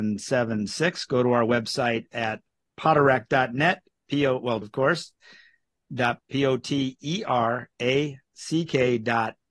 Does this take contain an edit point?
yes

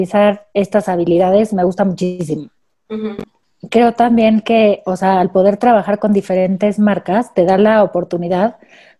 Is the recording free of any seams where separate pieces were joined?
yes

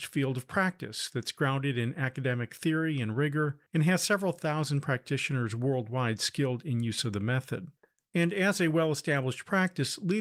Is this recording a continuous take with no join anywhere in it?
no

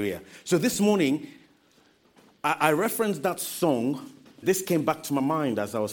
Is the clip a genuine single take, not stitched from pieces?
no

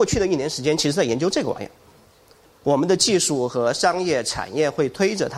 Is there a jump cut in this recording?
yes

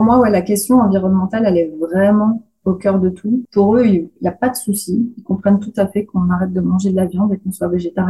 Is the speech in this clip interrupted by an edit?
yes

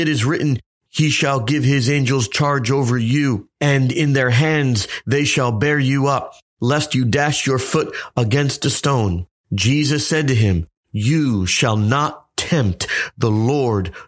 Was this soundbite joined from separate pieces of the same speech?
yes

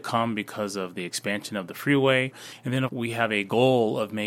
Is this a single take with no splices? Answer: no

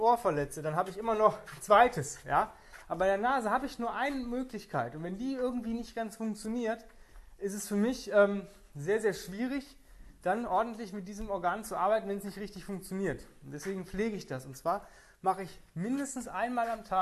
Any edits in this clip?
no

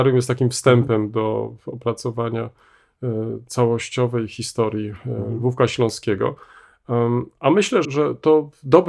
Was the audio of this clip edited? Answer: yes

